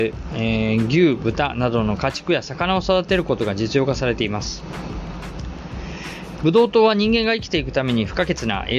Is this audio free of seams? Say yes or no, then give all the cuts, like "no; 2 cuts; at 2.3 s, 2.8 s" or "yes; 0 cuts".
no; 1 cut; at 6.4 s